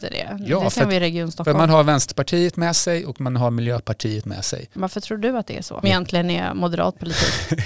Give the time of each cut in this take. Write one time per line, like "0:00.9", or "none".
0:04.8
0:05.8